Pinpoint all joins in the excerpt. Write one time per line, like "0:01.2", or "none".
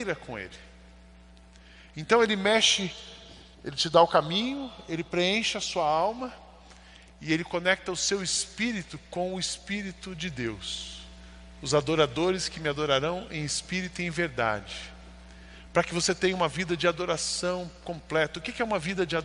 0:03.5